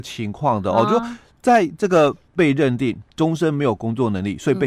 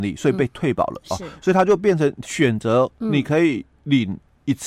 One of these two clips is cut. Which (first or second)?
first